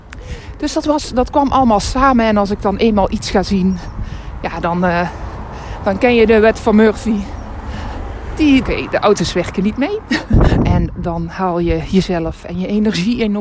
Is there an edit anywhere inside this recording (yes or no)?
yes